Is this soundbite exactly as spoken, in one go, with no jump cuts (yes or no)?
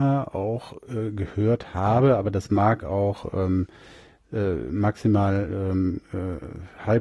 yes